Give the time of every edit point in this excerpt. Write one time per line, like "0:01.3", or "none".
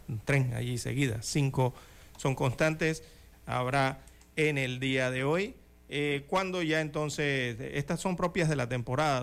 0:03.3